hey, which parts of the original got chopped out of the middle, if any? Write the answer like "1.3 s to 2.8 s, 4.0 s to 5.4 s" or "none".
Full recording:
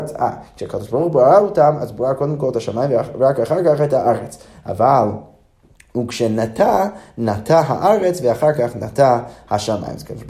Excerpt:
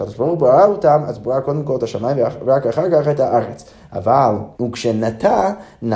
5.3 s to 5.9 s